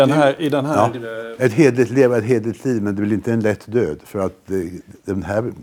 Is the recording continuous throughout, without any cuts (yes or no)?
yes